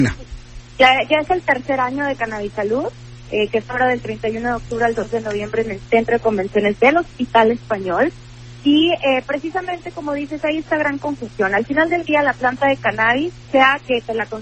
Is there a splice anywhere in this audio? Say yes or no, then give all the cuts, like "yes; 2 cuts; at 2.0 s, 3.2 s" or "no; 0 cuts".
yes; 1 cut; at 13.5 s